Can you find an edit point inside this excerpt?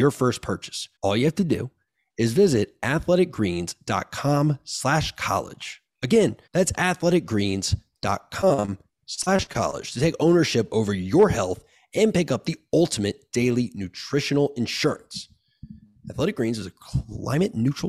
yes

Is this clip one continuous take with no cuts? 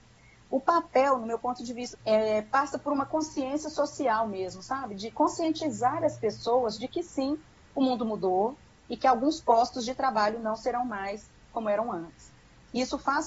no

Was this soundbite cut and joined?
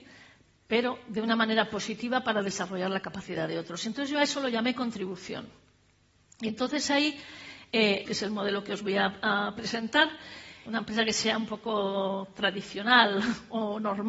yes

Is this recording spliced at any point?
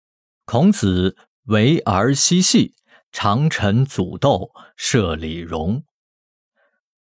no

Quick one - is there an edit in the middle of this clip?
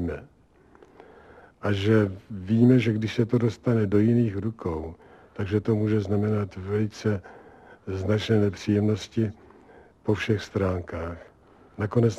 no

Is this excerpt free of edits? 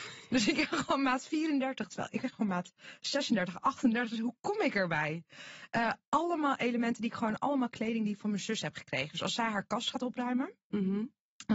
yes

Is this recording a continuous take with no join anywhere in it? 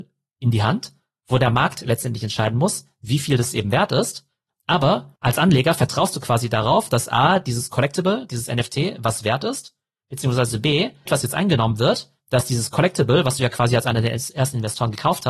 no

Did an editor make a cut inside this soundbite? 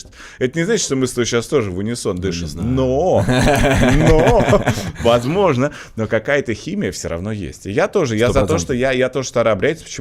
no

